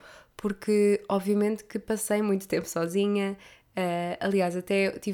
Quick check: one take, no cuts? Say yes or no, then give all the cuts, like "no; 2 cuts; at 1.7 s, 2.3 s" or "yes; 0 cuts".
yes; 0 cuts